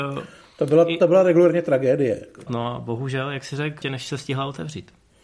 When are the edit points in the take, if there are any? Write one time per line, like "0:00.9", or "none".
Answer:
0:02.5
0:03.8

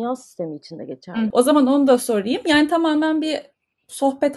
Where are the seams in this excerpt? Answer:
0:01.3

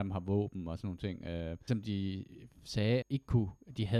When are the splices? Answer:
0:01.7
0:03.0

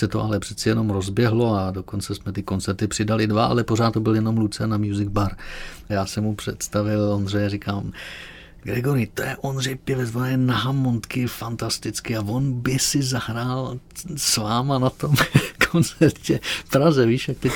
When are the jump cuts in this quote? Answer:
0:05.9

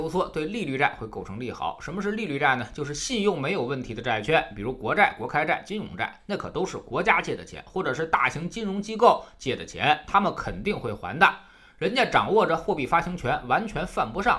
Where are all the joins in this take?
none

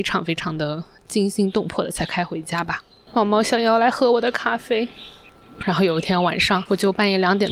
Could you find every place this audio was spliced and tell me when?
0:03.1
0:05.6

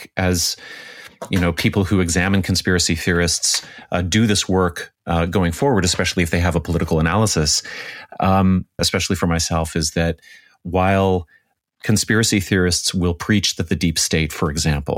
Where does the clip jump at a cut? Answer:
0:08.8

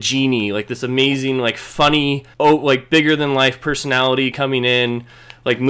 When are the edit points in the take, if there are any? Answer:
0:02.3

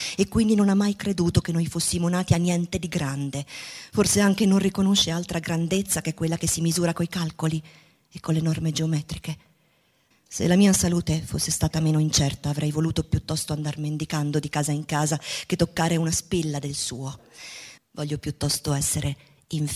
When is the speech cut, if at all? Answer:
0:10.1
0:17.8

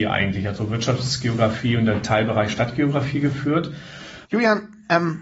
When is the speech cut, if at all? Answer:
0:04.2

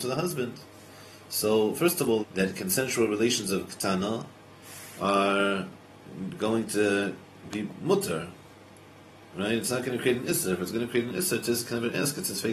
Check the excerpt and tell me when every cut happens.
0:02.2

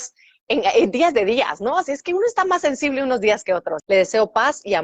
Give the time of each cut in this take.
0:03.8

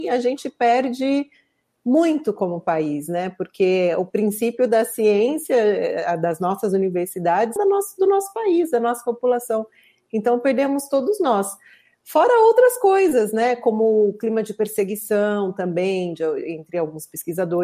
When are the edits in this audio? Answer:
0:07.6

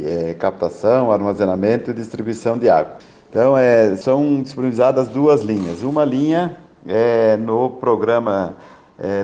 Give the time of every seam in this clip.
none

